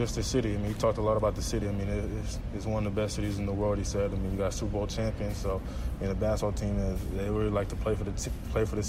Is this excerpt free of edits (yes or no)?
yes